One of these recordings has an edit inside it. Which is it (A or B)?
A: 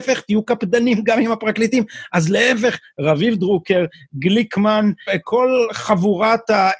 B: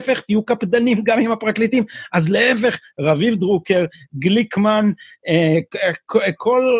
A